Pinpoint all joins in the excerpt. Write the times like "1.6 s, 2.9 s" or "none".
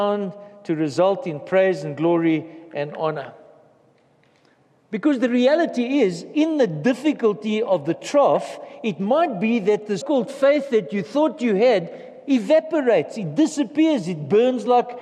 10.0 s